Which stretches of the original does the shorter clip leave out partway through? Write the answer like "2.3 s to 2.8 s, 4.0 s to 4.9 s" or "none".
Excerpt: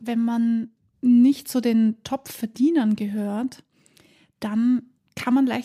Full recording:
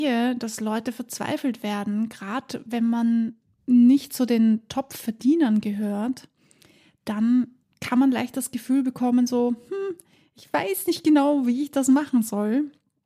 none

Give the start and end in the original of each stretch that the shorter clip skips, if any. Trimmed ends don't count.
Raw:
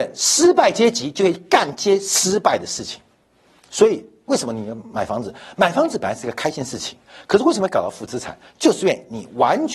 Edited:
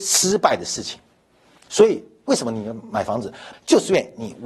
5.5 s to 8.5 s

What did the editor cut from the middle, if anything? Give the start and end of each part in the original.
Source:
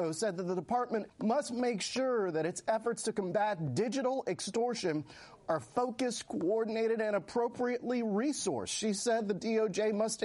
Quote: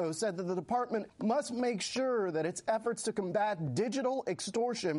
none

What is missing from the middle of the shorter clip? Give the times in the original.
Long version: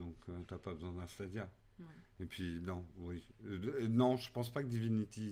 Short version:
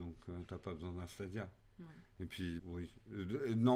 2.6 s to 2.9 s

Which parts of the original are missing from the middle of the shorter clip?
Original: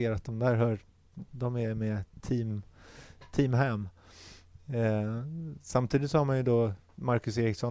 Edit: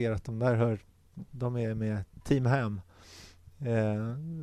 2.2 s to 3.3 s

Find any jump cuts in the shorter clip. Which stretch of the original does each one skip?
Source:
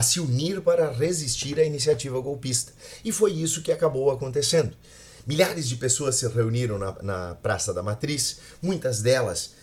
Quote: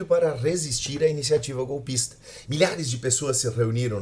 3.0 s to 5.2 s

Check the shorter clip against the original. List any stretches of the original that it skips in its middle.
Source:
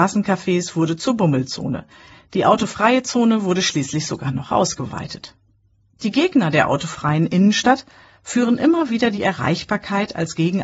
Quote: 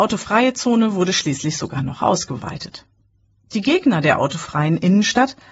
none

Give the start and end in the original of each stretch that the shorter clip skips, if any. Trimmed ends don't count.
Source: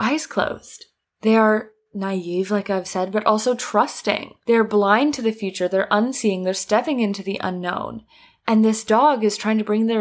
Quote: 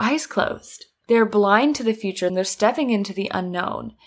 1.0 s to 4.4 s, 5.7 s to 6.4 s

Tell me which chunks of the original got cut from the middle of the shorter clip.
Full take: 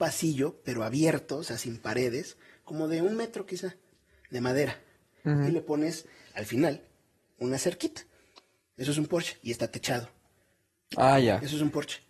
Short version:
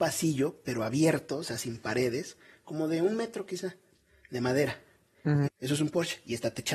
5.5 s to 8.6 s

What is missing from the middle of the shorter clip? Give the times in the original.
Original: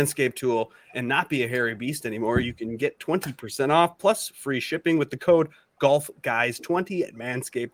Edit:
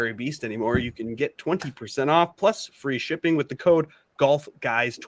none

